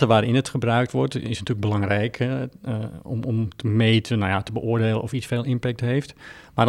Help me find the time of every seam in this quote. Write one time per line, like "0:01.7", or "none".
none